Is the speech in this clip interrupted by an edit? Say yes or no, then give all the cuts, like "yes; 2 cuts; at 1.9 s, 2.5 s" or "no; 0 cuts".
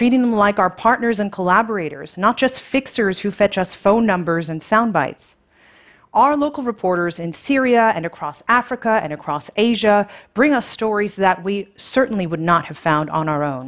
no; 0 cuts